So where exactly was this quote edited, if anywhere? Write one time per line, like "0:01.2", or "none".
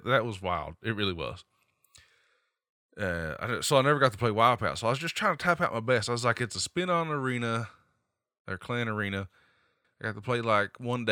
0:09.8